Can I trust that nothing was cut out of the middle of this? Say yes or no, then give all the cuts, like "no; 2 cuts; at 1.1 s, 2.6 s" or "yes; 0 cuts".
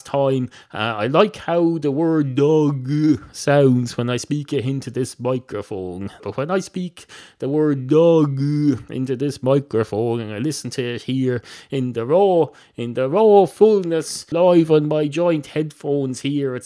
no; 2 cuts; at 6.2 s, 14.3 s